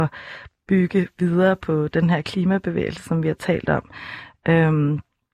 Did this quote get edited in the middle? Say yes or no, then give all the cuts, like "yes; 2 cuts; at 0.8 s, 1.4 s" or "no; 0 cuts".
no; 0 cuts